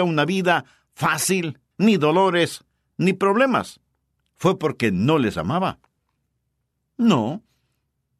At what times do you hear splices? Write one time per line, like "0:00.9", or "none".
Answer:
0:01.7
0:04.2